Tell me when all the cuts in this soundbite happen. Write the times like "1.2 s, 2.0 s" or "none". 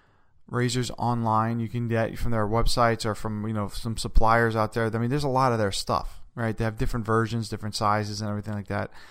none